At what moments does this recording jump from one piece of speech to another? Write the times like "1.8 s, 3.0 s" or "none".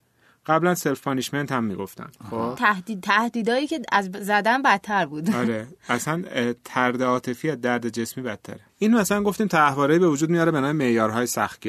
2.6 s, 8.7 s